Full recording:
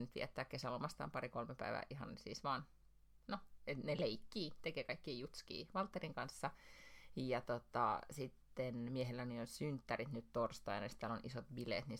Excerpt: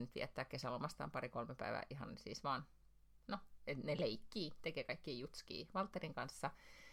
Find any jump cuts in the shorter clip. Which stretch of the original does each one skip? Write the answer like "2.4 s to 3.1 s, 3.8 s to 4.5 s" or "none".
none